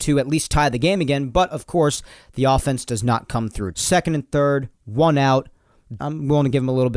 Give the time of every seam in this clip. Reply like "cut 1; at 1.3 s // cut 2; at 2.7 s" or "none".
cut 1; at 3.7 s // cut 2; at 6.0 s